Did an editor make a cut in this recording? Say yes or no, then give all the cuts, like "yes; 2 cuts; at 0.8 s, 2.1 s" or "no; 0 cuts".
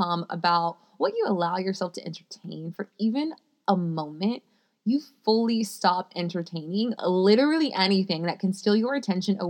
no; 0 cuts